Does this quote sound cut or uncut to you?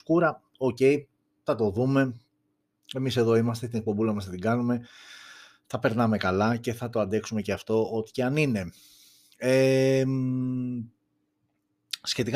uncut